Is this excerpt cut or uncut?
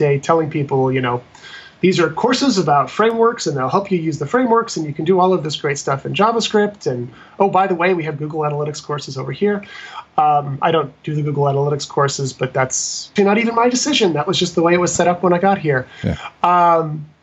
cut